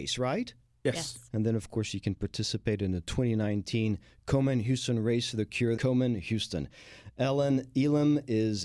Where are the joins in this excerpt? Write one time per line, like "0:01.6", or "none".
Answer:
0:01.3
0:05.8